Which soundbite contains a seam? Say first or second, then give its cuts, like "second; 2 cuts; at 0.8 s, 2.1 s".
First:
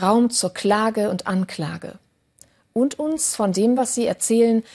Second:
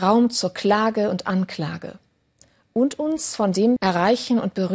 second; 1 cut; at 3.8 s